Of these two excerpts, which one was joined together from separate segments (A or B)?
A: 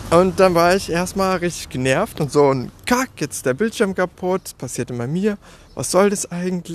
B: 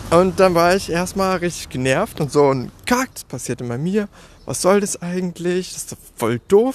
B